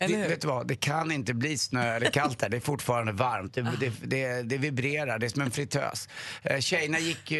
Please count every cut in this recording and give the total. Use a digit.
0